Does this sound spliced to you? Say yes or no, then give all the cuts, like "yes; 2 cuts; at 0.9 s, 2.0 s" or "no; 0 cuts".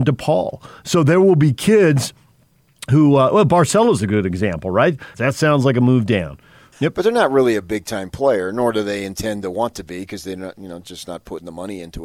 yes; 2 cuts; at 5.1 s, 6.7 s